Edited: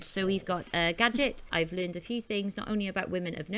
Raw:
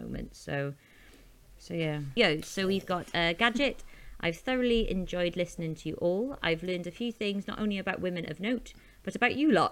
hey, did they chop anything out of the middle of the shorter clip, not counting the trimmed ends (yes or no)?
yes